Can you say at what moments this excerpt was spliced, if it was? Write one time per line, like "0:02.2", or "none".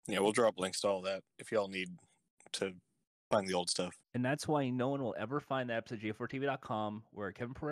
0:04.0